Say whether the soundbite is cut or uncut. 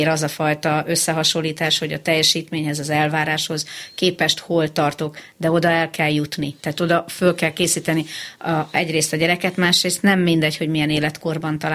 cut